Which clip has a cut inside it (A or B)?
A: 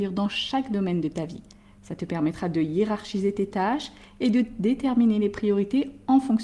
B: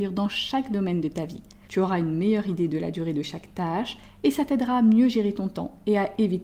B